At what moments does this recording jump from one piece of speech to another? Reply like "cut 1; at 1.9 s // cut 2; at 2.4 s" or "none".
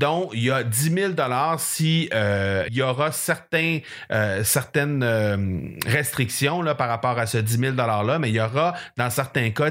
cut 1; at 2.7 s